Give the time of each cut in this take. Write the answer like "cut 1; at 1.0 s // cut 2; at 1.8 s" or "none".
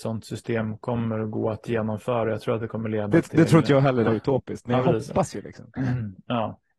cut 1; at 4.0 s

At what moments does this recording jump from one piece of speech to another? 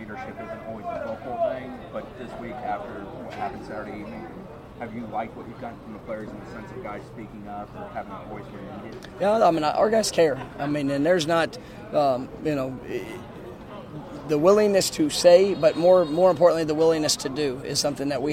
none

